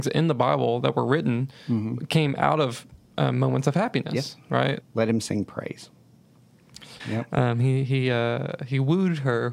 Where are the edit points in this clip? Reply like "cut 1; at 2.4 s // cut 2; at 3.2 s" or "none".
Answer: cut 1; at 4.8 s // cut 2; at 7.0 s